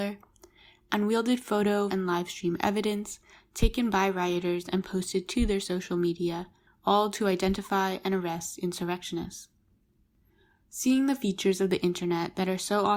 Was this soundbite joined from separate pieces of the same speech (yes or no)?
yes